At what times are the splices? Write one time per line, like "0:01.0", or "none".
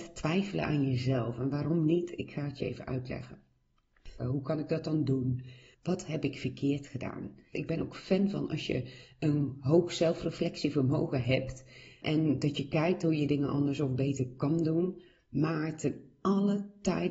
0:04.2
0:05.7
0:07.5

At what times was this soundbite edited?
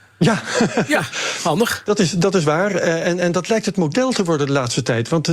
none

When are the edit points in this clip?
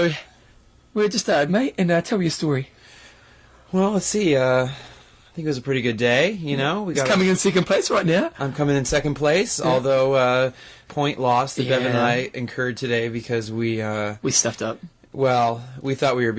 0:01.5
0:10.9

